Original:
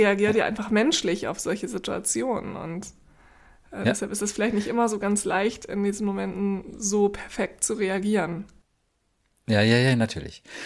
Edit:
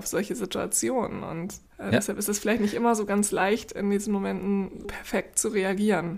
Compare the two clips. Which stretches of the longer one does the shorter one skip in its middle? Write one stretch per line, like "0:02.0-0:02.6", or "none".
0:03.0-0:03.6
0:06.8-0:07.1